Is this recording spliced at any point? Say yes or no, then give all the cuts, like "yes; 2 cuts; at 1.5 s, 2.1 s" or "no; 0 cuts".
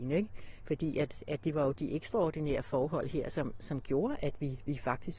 no; 0 cuts